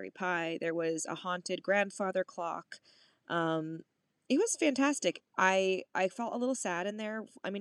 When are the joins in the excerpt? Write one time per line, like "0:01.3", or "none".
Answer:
0:05.2